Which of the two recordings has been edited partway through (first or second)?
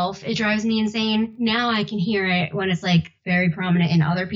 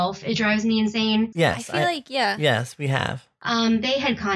second